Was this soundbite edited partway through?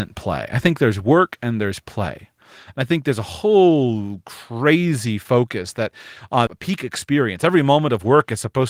yes; 1 cut; at 6.5 s

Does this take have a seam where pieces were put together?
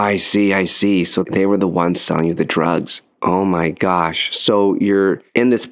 no; 0 cuts

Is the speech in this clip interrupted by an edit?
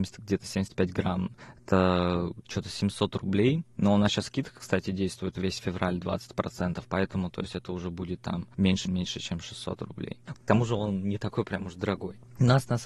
yes; 2 cuts; at 8.9 s, 10.3 s

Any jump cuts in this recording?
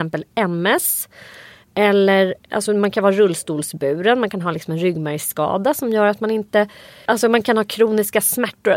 no; 0 cuts

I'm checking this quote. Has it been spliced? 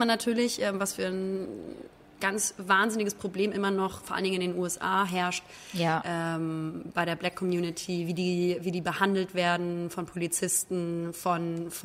no; 0 cuts

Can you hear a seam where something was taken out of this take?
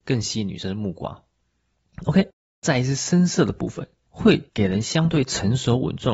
yes; 1 cut; at 4.1 s

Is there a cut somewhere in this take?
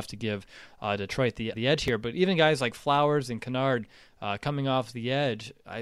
yes; 1 cut; at 1.5 s

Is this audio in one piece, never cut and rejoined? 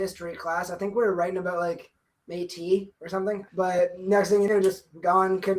yes; 0 cuts

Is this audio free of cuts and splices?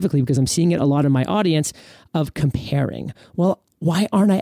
yes; 0 cuts

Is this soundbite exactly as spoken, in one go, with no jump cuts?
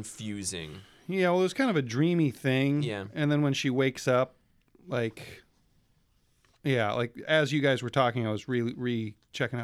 yes; 0 cuts

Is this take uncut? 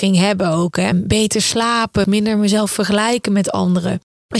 no; 2 cuts; at 0.9 s, 2.0 s

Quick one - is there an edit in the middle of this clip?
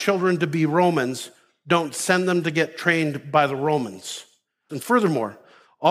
yes; 1 cut; at 4.7 s

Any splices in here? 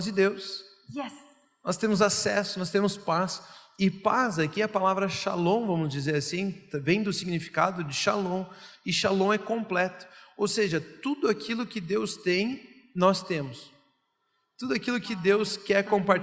no; 0 cuts

